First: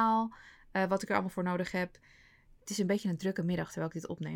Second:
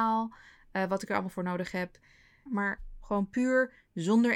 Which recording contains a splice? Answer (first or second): second